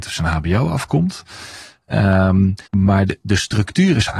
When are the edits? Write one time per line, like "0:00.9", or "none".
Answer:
0:02.7